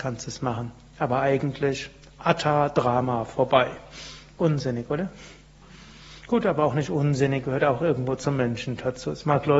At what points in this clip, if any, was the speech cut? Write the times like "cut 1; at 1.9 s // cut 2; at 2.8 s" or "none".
cut 1; at 4.4 s